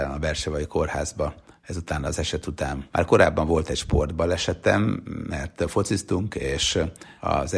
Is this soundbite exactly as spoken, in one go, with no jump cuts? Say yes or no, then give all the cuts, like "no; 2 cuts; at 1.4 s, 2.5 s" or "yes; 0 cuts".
no; 1 cut; at 2.9 s